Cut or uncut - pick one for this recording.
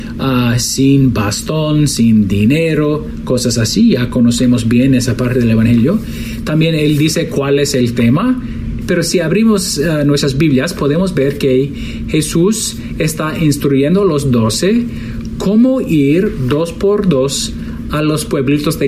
cut